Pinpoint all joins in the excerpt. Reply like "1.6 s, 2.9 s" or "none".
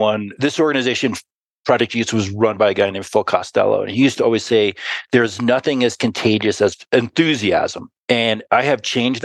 8.0 s